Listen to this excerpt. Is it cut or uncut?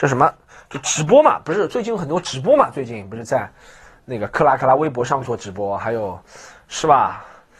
uncut